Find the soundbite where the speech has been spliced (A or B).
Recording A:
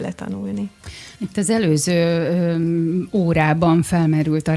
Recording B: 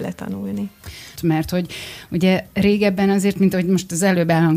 B